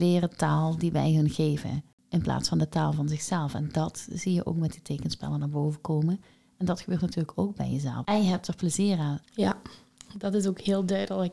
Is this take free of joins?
no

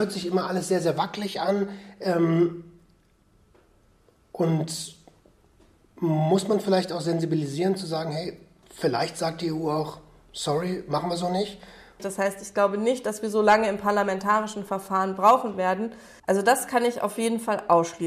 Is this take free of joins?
no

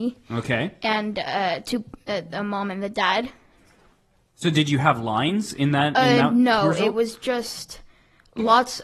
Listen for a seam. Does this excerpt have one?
no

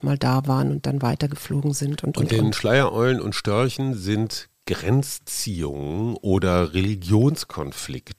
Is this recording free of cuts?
yes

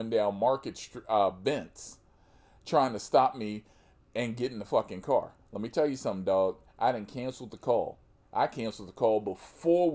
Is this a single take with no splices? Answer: yes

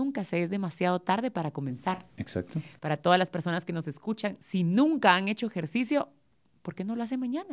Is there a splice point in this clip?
no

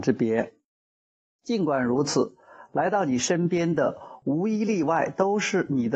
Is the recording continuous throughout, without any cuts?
yes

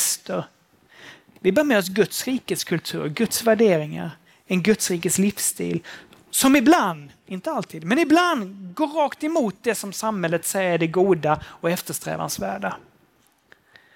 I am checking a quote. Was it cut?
no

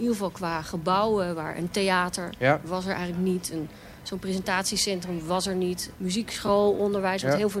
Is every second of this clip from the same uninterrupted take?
no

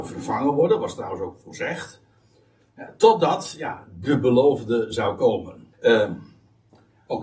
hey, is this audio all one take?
no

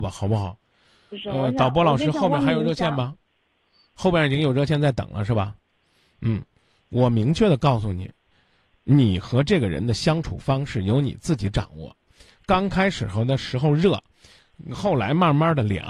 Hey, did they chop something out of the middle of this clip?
no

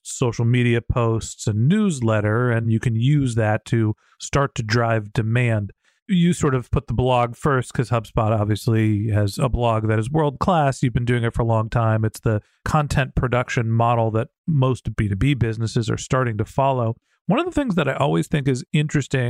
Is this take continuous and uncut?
yes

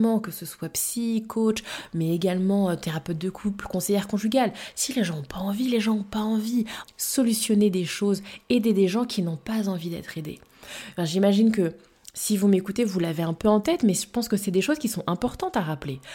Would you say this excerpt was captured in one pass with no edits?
no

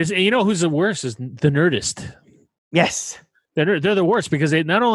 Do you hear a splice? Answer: no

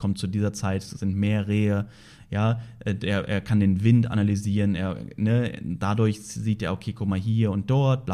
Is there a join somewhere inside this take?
no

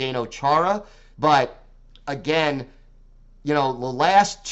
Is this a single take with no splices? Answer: no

